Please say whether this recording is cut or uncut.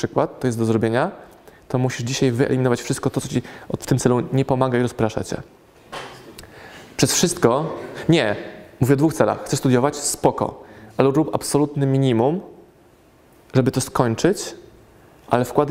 uncut